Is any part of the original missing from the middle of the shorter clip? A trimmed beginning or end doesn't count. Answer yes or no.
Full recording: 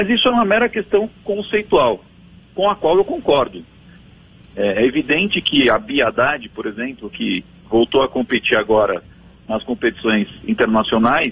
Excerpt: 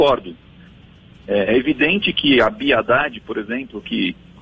no